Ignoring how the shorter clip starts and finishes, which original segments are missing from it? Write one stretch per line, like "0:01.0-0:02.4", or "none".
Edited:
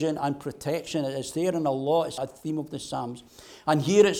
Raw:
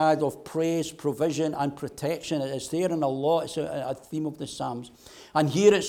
0:03.5-0:03.8